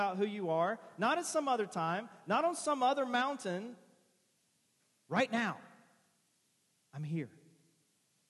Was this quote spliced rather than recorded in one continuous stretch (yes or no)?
no